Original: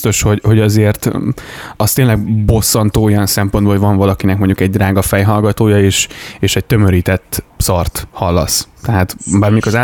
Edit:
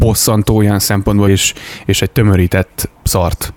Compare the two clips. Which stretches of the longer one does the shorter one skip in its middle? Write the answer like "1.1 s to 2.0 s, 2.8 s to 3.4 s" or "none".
3.7 s to 5.8 s